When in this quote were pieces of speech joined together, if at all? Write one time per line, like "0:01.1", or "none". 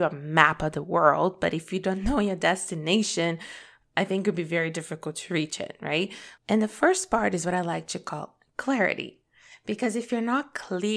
0:06.4